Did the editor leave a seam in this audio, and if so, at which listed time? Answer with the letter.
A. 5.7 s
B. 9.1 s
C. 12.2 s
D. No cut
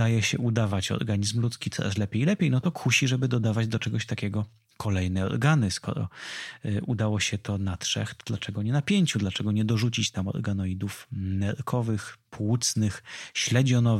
D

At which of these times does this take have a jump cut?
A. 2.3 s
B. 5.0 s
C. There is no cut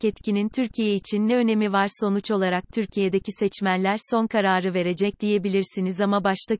C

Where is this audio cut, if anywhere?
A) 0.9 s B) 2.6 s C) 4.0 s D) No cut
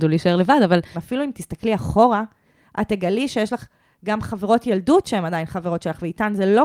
A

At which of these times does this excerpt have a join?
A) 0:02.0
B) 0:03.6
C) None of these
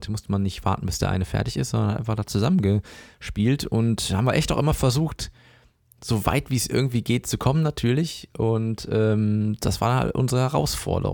C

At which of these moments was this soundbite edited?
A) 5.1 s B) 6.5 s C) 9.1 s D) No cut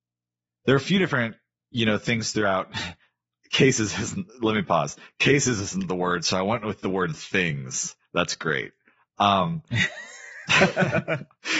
D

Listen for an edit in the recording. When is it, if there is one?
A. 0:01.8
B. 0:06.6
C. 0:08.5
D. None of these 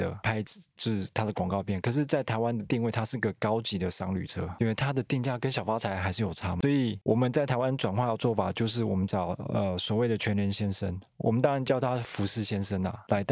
D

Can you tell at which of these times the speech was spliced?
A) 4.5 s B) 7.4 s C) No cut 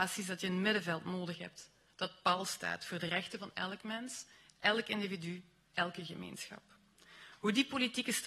C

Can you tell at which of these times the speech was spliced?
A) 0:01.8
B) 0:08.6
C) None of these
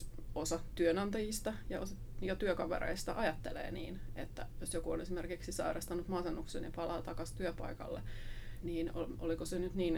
B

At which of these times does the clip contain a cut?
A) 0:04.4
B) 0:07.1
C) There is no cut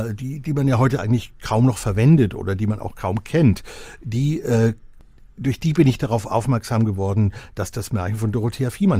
C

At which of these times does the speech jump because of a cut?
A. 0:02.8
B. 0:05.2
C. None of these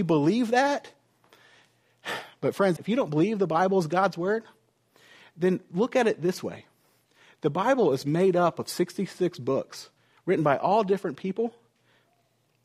A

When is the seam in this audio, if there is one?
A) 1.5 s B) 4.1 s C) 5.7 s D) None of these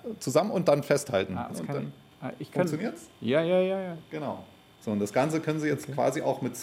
A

